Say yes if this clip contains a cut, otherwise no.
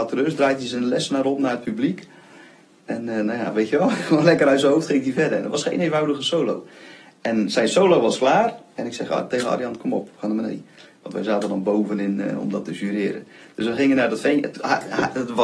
no